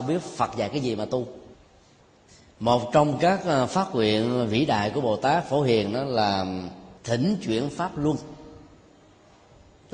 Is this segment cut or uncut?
cut